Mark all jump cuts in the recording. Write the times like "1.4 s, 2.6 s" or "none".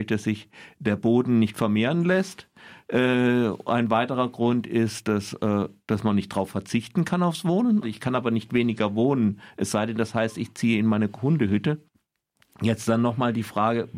7.8 s